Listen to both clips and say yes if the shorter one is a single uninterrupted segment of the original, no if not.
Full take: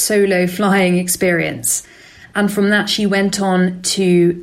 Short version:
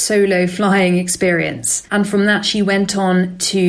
no